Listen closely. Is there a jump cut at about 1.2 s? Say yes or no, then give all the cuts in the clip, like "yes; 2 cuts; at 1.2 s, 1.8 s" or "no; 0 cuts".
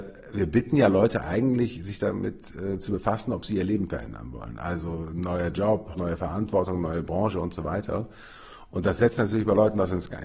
no; 1 cut; at 5.9 s